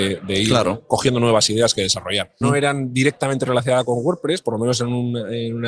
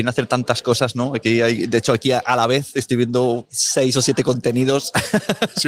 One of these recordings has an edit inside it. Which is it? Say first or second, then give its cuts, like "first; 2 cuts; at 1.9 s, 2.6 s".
first; 1 cut; at 2.4 s